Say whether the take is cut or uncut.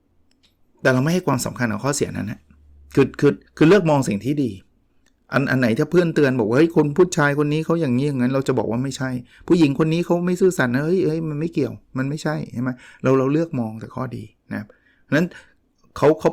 cut